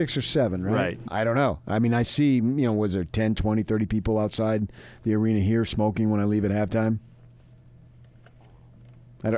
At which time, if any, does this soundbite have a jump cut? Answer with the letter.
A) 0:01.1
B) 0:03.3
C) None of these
A